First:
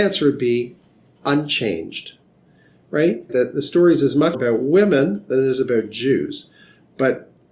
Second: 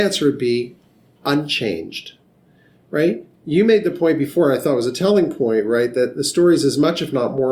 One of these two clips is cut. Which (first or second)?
first